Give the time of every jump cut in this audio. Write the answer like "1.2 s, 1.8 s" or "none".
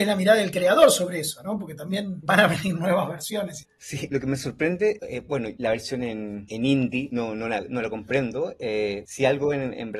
3.6 s

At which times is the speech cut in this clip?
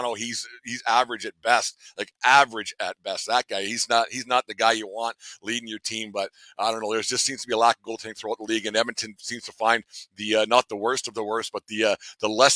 none

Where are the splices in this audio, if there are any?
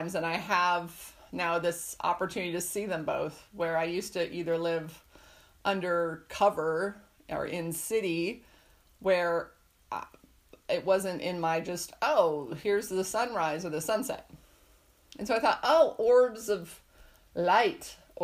none

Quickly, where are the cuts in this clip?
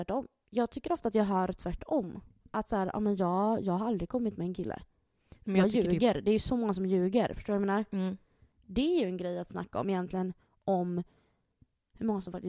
none

